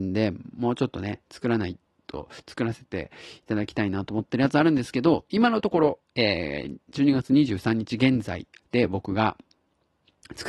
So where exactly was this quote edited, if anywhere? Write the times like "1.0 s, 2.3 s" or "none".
none